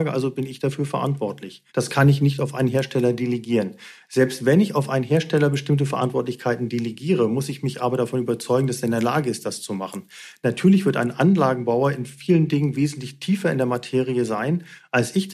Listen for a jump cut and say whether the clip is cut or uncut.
cut